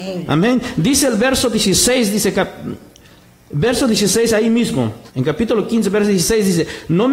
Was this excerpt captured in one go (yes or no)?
no